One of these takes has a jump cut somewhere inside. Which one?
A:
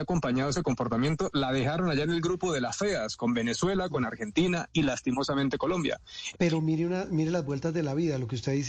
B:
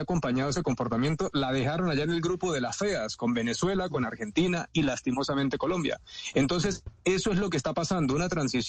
A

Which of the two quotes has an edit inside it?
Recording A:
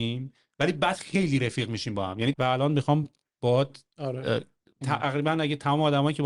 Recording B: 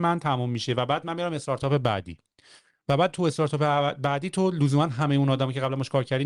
A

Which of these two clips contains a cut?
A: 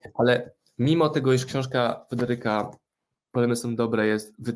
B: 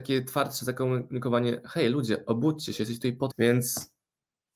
B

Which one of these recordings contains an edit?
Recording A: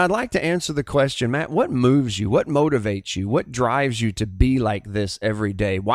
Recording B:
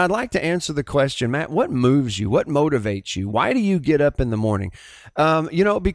B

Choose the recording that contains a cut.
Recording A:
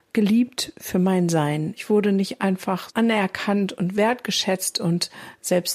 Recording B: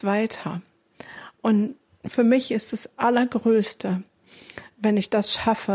A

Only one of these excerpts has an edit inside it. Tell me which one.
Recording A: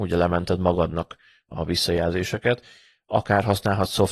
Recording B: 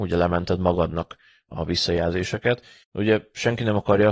B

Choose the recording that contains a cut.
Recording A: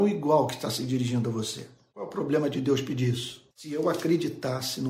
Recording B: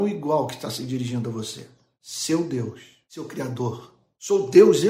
A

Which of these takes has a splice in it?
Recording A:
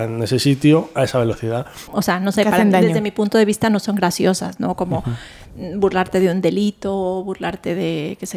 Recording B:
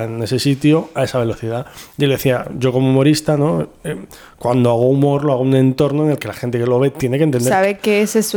A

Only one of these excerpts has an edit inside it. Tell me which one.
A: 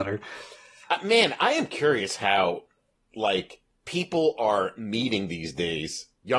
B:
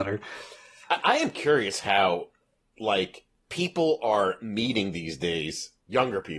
B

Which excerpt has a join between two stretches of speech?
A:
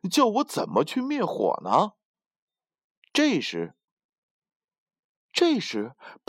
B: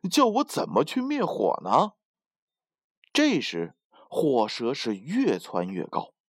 A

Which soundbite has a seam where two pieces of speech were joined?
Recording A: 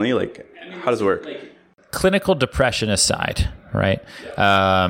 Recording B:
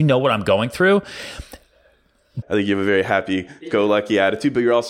B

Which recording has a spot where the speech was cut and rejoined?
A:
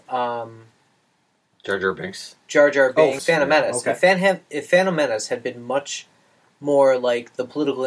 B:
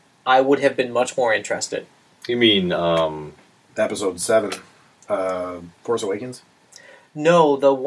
A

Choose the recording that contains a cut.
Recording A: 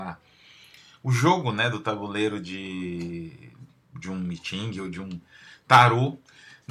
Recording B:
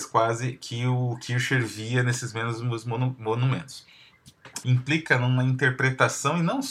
B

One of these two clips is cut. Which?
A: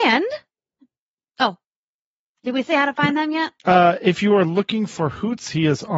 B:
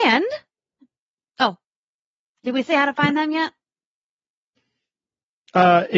A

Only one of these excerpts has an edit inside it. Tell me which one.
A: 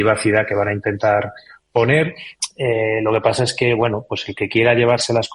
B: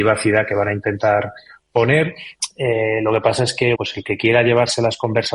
B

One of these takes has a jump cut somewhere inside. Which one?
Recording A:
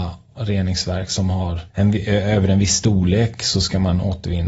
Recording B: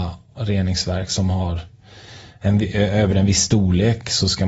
A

